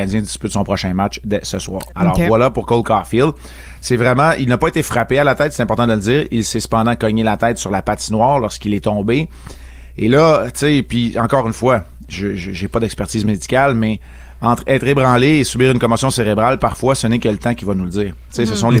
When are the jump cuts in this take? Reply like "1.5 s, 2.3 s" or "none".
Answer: 1.9 s